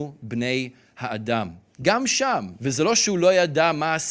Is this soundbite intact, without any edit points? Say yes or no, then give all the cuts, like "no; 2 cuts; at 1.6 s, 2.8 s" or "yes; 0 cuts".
no; 1 cut; at 2.6 s